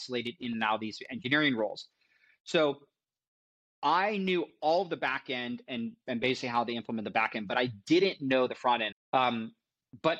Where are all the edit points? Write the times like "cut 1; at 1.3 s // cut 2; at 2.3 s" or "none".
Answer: cut 1; at 2.3 s // cut 2; at 8.9 s